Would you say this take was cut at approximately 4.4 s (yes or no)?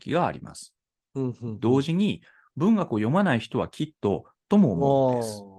yes